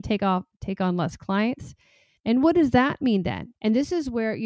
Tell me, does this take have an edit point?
yes; 2 cuts; at 2.2 s, 3.5 s

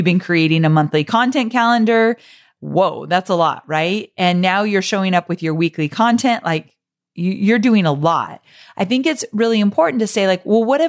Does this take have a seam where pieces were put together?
no; 0 cuts

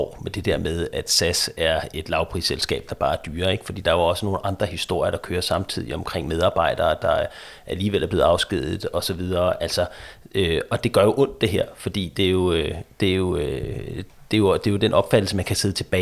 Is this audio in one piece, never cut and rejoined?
yes; 0 cuts

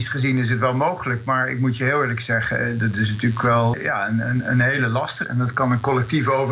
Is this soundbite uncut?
no; 2 cuts; at 3.7 s, 5.2 s

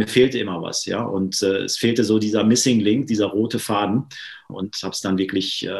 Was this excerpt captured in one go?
no; 1 cut; at 4.5 s

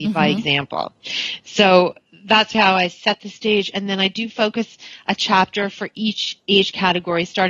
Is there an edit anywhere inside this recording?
yes; 1 cut; at 2.5 s

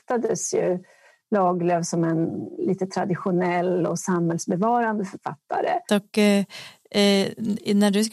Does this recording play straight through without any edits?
no; 1 cut; at 5.9 s

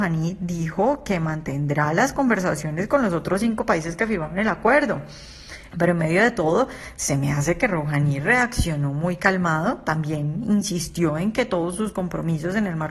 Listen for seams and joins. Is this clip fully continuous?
no; 1 cut; at 5.7 s

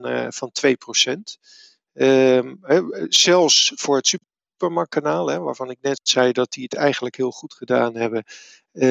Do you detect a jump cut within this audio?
no; 0 cuts

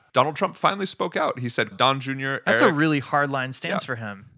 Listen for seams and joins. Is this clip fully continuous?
no; 1 cut; at 1.7 s

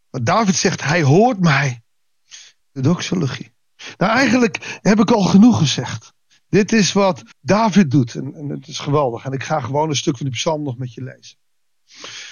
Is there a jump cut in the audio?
yes; 2 cuts; at 2.6 s, 7.3 s

